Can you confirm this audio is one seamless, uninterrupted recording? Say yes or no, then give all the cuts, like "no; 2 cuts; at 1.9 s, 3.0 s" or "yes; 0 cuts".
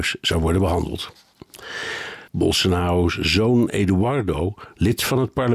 no; 1 cut; at 2.3 s